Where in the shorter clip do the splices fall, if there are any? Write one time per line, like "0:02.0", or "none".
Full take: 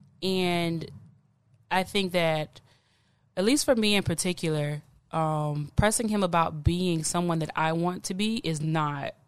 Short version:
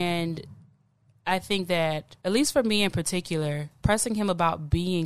0:02.2
0:03.8